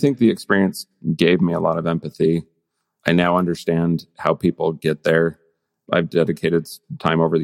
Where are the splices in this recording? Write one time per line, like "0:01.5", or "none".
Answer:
none